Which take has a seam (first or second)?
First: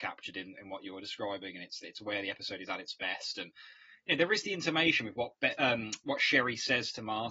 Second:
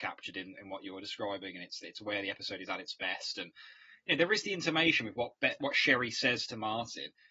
second